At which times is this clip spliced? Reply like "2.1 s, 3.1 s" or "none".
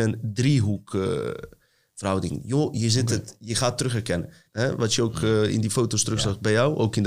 4.4 s